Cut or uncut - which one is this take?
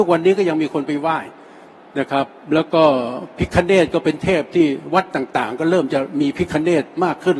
uncut